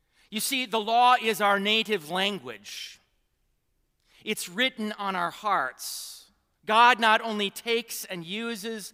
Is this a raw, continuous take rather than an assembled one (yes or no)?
no